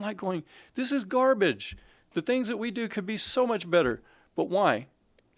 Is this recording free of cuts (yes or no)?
yes